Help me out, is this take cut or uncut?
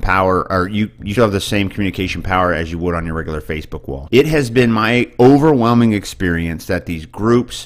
cut